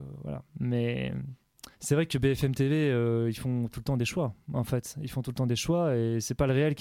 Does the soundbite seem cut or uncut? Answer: cut